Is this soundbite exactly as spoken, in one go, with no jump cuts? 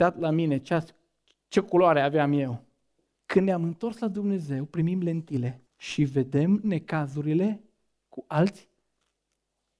no; 2 cuts; at 3.1 s, 5.7 s

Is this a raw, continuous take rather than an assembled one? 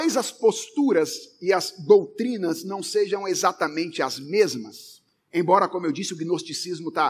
yes; 0 cuts

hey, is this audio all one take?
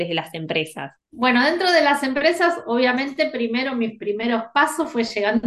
yes; 0 cuts

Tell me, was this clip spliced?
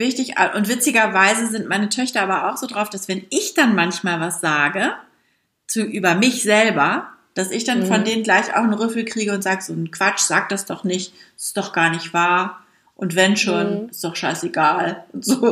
no; 0 cuts

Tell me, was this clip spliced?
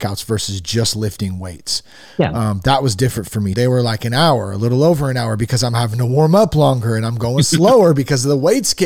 yes; 1 cut; at 3.5 s

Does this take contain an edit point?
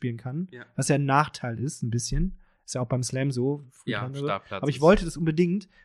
no; 0 cuts

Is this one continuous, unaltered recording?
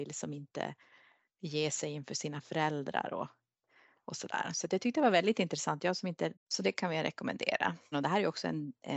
no; 2 cuts; at 6.3 s, 7.9 s

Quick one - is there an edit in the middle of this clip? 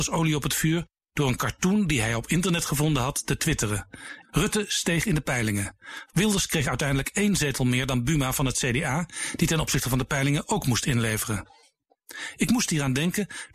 yes; 2 cuts; at 4.2 s, 6.1 s

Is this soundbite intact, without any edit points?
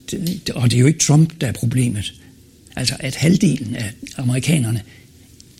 no; 1 cut; at 2.7 s

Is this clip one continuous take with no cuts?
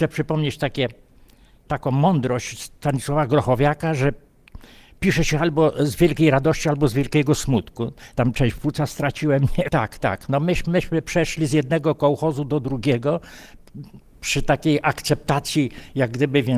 no; 2 cuts; at 8.1 s, 9.7 s

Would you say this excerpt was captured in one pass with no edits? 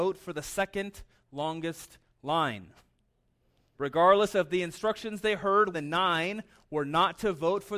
no; 2 cuts; at 3.7 s, 5.7 s

